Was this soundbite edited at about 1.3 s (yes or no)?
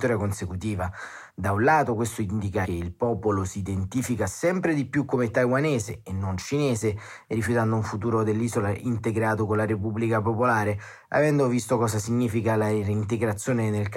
no